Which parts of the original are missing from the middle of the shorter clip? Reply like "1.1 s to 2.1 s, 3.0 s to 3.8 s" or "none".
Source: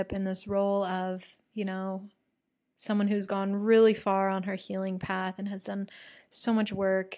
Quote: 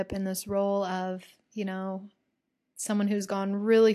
none